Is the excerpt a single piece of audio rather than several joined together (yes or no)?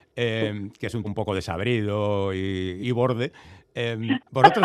no